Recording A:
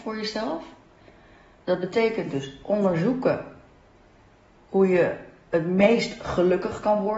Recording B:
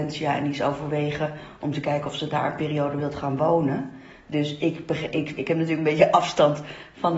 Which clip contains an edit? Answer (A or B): B